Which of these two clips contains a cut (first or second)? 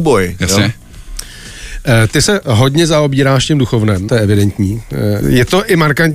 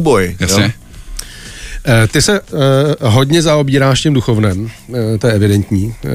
first